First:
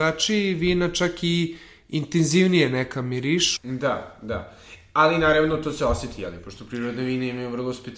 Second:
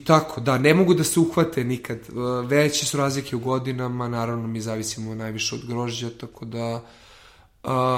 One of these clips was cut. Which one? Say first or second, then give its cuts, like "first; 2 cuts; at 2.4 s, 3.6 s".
first; 1 cut; at 3.6 s